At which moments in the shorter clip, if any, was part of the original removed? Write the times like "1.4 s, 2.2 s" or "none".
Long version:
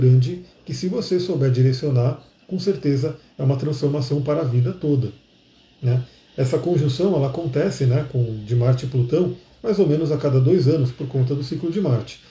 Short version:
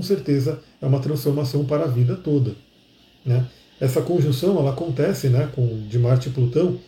none